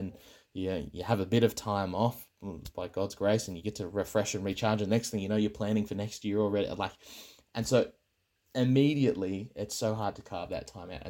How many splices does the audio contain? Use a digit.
0